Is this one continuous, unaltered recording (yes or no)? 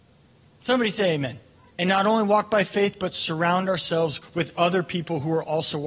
no